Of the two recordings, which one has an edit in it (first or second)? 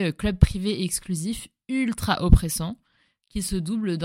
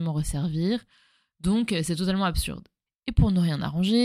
second